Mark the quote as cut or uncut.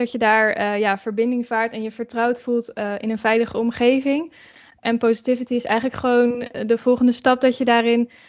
uncut